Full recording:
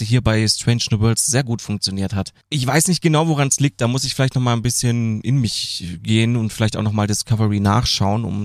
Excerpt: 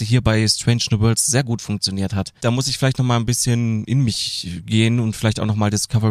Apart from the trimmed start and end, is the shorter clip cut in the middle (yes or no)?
yes